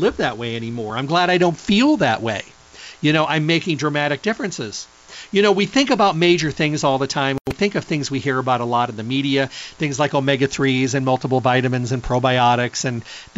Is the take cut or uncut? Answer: uncut